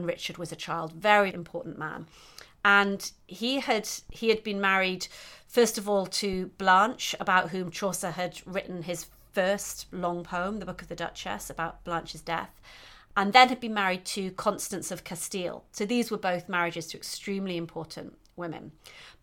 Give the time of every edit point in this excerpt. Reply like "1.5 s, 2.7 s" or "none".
1.3 s